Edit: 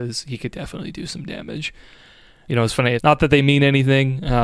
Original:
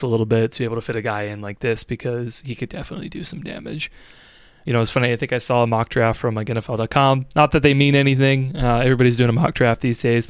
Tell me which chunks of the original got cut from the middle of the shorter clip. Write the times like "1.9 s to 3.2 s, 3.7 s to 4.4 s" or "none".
5.1 s to 7.3 s